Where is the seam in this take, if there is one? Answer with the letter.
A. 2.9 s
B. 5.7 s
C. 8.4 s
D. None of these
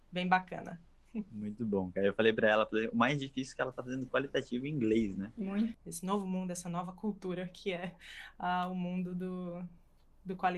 B